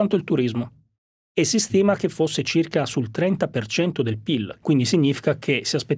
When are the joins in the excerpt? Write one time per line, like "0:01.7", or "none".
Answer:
0:04.6